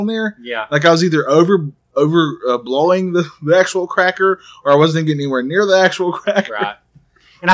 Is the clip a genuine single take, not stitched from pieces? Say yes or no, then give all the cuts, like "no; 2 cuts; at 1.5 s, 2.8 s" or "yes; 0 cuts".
yes; 0 cuts